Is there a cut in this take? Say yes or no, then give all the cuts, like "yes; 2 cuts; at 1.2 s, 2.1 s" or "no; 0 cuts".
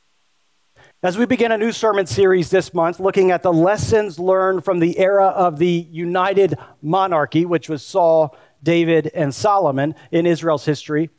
yes; 1 cut; at 0.9 s